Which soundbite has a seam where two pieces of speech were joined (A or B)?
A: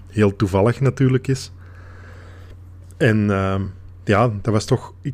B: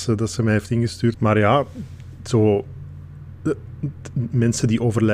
B